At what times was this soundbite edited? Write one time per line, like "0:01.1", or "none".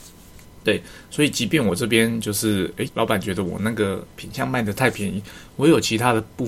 0:02.9